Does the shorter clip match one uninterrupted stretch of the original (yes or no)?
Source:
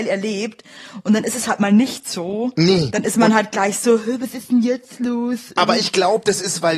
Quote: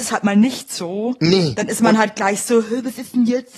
yes